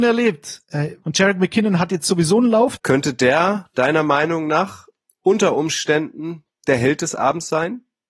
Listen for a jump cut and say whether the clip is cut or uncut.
cut